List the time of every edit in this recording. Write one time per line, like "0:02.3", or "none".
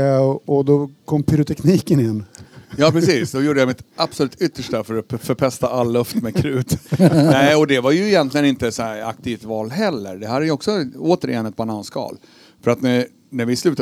none